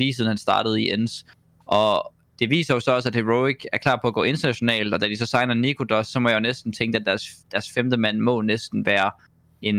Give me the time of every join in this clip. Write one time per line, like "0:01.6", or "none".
none